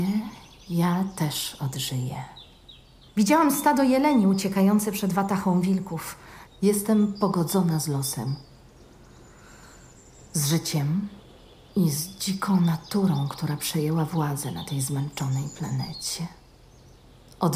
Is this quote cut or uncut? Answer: cut